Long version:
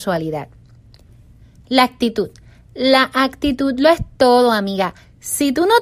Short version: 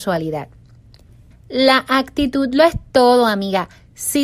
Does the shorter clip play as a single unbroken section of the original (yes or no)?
no